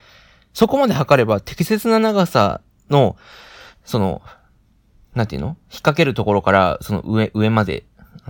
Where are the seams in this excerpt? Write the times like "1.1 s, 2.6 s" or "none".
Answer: none